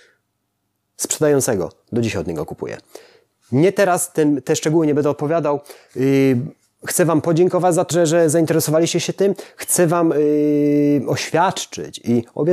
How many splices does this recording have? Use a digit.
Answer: 1